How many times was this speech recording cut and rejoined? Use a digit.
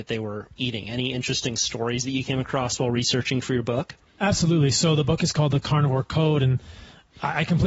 0